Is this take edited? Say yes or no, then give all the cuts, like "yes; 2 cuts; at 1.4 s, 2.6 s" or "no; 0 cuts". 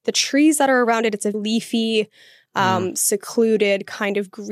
yes; 1 cut; at 1.3 s